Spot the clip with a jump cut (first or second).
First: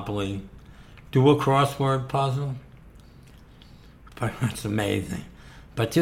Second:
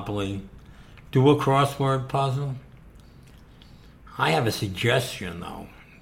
first